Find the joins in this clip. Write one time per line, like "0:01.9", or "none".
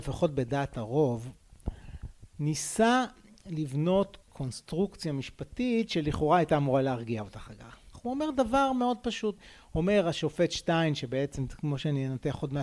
0:07.9